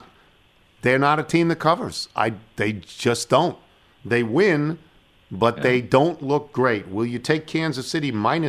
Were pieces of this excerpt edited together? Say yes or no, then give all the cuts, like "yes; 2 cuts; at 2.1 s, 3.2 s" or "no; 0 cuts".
no; 0 cuts